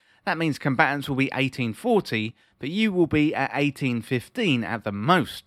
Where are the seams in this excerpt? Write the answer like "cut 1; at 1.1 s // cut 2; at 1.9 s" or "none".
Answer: none